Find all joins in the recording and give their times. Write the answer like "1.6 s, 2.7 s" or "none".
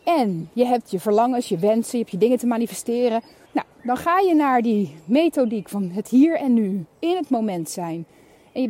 3.5 s